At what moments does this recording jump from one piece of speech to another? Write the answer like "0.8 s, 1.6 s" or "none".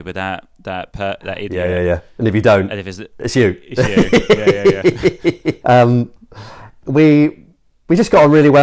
5.6 s